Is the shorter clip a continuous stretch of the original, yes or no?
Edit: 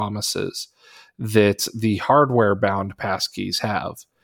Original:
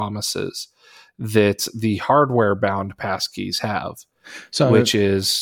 yes